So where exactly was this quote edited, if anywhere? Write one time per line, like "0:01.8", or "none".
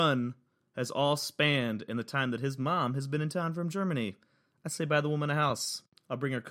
none